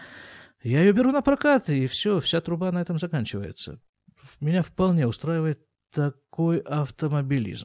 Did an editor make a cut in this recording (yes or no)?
no